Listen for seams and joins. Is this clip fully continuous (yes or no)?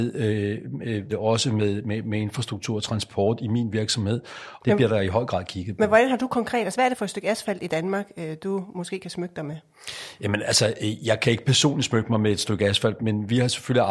no